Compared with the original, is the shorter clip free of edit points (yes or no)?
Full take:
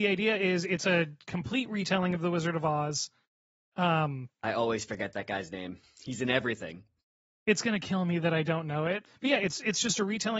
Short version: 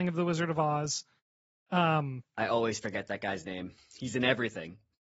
yes